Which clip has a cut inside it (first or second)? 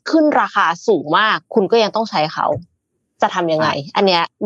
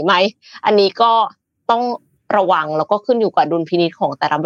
first